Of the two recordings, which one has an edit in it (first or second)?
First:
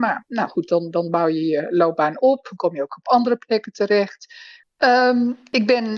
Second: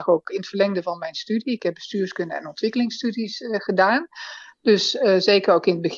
first